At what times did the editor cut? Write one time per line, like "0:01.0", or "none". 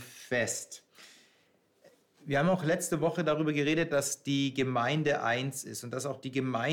none